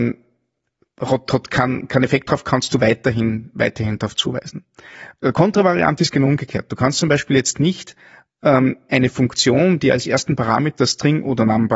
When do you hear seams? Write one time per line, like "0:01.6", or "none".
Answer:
none